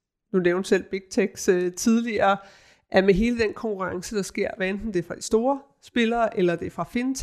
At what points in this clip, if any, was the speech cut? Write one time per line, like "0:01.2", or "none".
none